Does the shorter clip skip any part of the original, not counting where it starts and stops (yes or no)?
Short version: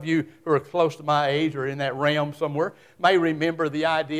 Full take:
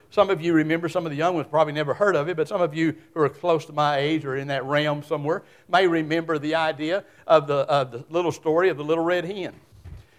no